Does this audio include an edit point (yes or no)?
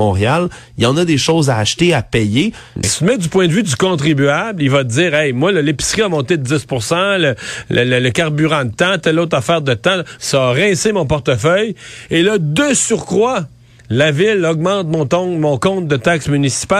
yes